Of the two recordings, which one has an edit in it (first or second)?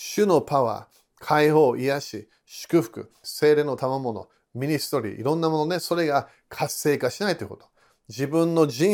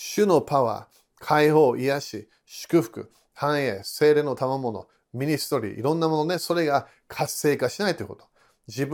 first